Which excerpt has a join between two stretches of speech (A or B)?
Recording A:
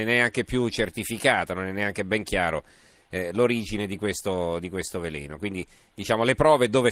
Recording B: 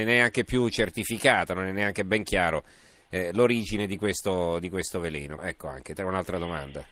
B